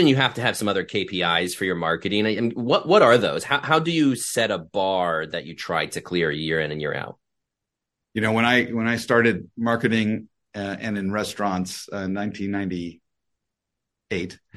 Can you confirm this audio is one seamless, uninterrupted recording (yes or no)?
yes